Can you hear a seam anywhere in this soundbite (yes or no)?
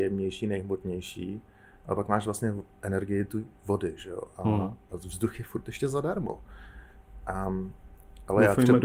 yes